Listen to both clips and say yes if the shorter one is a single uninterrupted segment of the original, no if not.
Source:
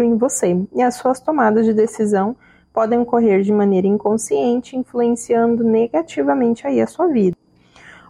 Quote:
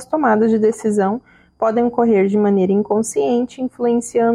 yes